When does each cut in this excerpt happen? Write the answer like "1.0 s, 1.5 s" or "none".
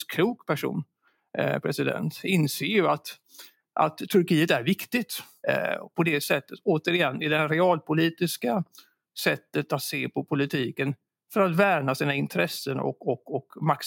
5.4 s